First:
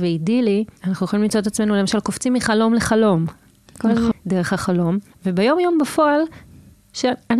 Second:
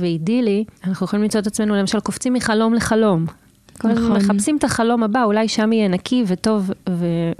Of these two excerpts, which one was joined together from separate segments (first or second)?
first